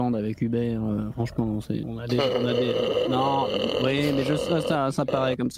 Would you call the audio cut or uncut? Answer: cut